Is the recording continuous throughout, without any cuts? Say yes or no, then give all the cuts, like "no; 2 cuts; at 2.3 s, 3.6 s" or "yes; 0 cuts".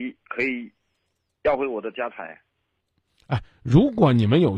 yes; 0 cuts